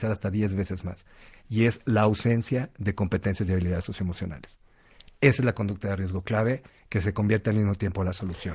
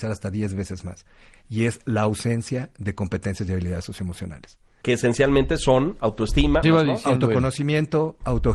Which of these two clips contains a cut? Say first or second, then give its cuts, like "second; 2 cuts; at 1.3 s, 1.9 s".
second; 2 cuts; at 4.8 s, 6.6 s